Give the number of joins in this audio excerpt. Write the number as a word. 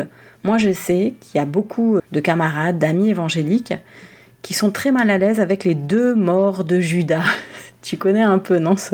one